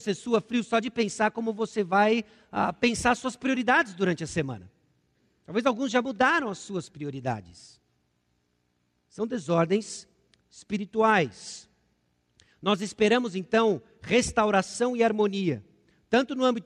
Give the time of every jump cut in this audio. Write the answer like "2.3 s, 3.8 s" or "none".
none